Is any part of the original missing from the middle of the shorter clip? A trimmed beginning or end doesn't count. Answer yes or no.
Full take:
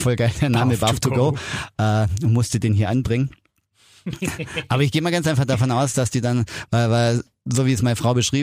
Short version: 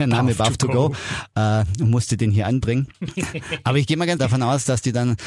yes